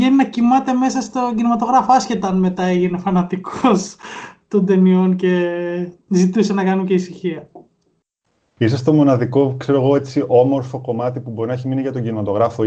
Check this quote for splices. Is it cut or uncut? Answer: uncut